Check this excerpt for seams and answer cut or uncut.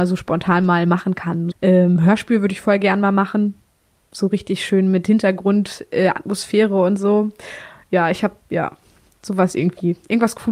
cut